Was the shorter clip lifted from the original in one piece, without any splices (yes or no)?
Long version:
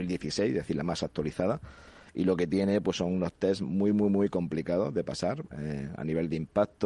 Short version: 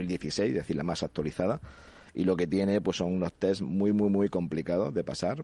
yes